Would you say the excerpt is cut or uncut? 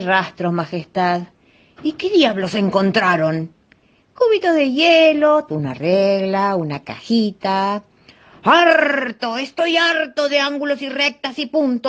cut